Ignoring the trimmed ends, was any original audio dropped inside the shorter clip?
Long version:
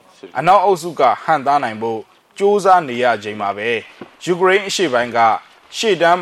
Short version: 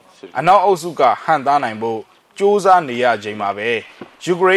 no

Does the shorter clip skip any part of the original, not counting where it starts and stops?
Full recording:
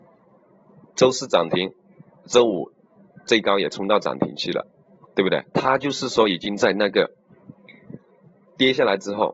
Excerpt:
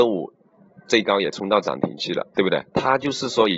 yes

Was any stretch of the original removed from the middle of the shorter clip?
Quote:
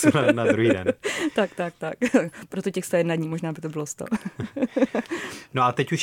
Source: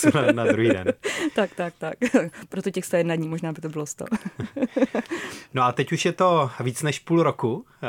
no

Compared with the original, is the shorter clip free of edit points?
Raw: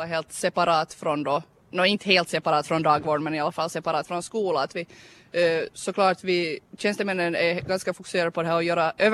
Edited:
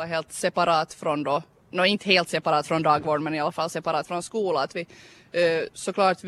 yes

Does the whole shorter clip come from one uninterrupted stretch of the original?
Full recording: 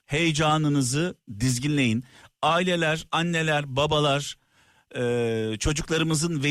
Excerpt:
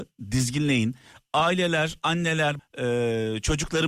no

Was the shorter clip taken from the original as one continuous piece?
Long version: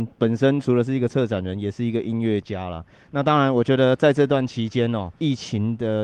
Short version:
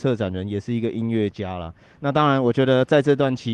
yes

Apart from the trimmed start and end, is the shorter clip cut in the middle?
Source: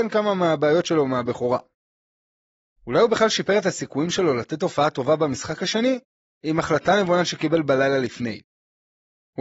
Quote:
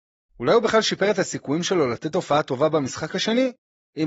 no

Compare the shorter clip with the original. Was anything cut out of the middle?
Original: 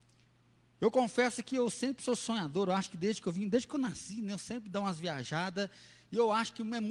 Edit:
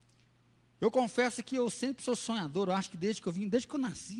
no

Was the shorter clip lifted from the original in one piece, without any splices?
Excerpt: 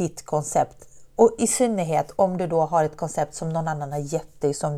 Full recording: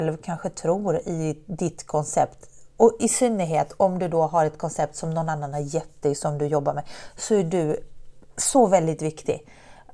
yes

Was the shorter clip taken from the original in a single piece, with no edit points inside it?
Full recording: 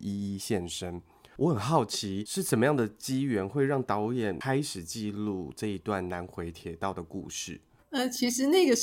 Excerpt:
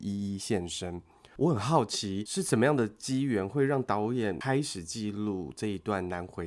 yes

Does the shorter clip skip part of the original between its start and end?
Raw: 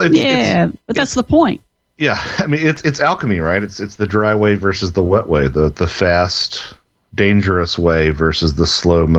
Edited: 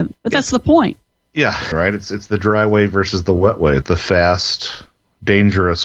yes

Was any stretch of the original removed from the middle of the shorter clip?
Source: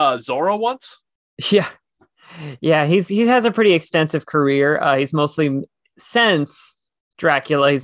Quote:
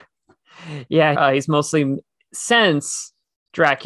yes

